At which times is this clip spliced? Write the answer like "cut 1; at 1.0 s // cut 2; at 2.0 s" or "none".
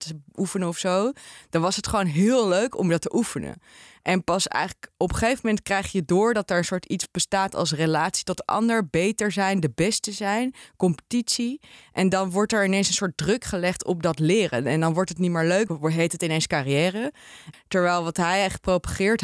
cut 1; at 15.7 s // cut 2; at 17.5 s